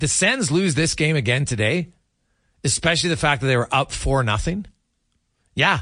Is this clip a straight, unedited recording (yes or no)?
yes